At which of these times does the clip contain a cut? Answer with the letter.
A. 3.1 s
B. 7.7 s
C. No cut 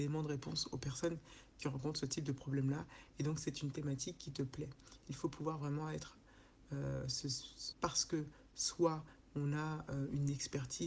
B